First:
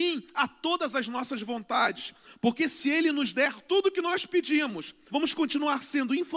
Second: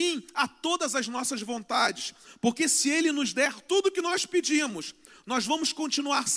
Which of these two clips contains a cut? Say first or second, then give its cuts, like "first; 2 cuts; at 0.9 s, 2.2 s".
first; 1 cut; at 5.1 s